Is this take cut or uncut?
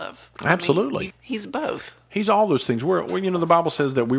cut